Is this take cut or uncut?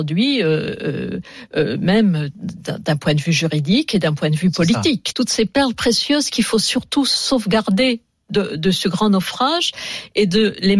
cut